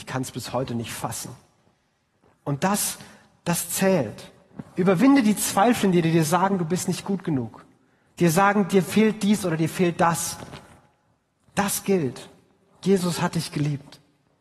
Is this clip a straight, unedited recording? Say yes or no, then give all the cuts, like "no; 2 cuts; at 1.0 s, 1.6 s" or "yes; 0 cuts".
yes; 0 cuts